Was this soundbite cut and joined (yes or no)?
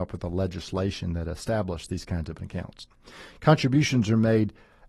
no